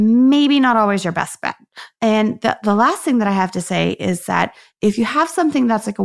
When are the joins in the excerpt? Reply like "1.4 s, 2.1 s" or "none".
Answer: 1.9 s